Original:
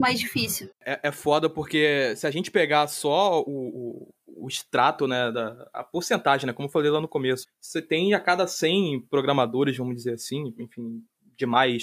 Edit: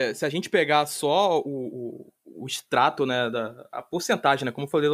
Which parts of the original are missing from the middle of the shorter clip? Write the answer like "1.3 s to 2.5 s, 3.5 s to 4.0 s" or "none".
none